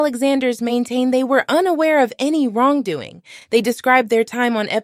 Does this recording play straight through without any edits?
yes; 0 cuts

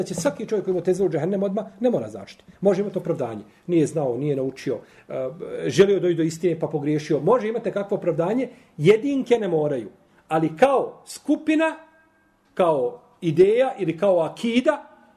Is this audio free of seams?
yes; 0 cuts

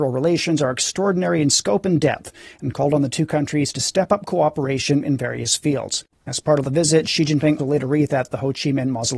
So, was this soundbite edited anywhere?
yes; 1 cut; at 7.6 s

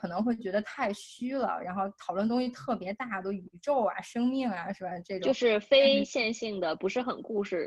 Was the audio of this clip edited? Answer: no; 0 cuts

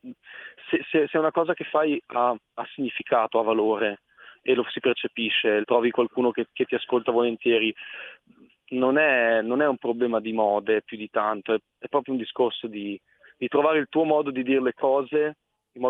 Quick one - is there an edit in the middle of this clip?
yes; 1 cut; at 5.6 s

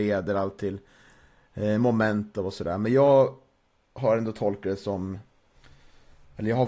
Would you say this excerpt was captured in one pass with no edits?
yes; 0 cuts

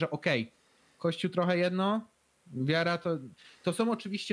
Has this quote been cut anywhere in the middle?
no; 0 cuts

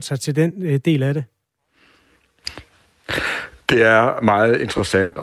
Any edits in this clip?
no; 0 cuts

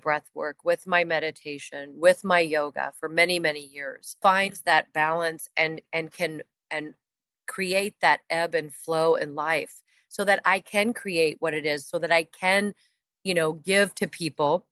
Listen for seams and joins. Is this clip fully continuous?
no; 1 cut; at 4.2 s

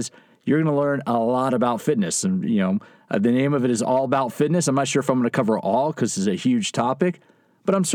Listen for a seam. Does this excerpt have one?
no; 0 cuts

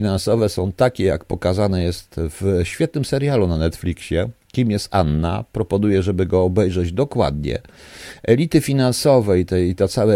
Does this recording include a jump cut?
no; 0 cuts

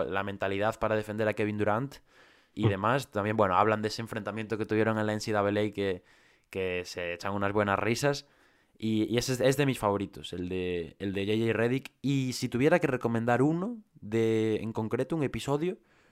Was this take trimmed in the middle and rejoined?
yes; 1 cut; at 2.5 s

